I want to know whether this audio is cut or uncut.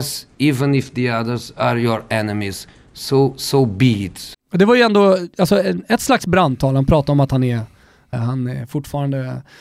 cut